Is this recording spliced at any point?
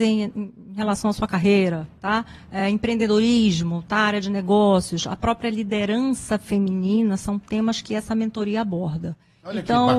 no; 0 cuts

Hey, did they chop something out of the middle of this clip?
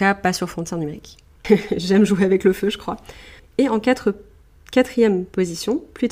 yes; 2 cuts; at 1.4 s, 3.4 s

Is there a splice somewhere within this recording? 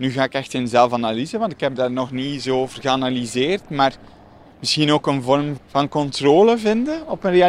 yes; 1 cut; at 5.6 s

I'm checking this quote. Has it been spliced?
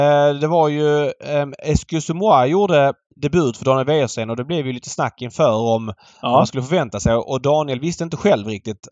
no; 0 cuts

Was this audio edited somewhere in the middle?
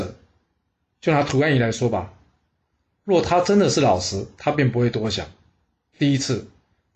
no; 0 cuts

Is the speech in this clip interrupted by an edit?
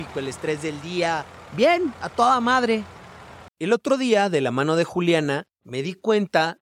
yes; 1 cut; at 3.5 s

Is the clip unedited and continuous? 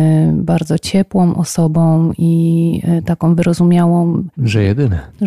no; 1 cut; at 4.4 s

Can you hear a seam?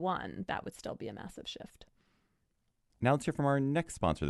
no; 0 cuts

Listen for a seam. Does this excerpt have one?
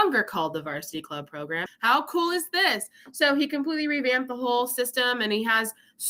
yes; 1 cut; at 1.7 s

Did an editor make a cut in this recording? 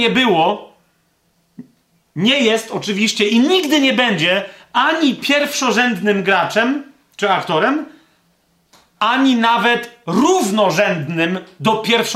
no; 0 cuts

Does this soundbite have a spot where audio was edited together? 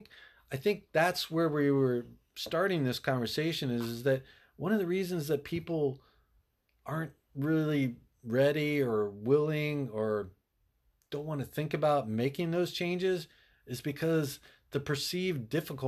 no; 0 cuts

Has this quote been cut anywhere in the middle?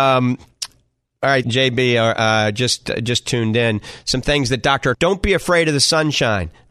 yes; 2 cuts; at 1.4 s, 4.9 s

